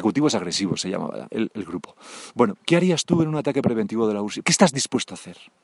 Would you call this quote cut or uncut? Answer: cut